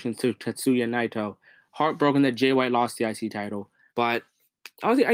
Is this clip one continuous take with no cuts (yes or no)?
no